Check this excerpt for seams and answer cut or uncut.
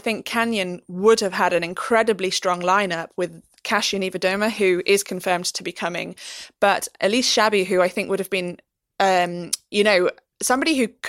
uncut